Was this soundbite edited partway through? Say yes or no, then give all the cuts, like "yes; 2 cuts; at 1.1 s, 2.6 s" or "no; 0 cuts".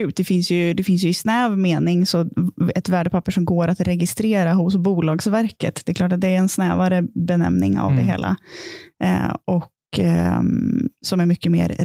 no; 0 cuts